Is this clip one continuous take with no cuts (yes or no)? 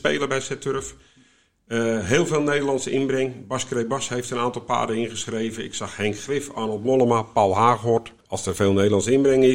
yes